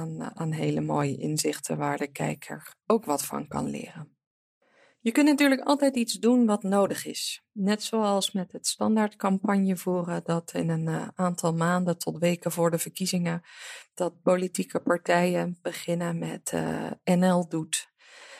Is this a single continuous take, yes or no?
yes